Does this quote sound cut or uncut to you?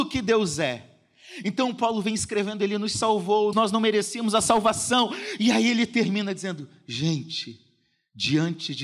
cut